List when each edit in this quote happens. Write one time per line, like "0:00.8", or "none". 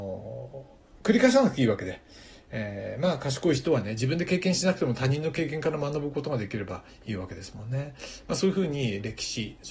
none